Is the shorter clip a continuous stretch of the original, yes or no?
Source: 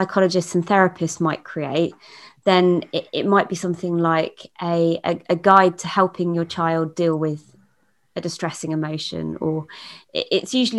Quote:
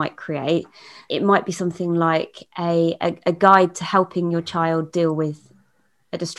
no